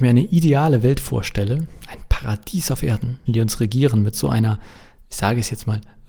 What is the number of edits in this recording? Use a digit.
1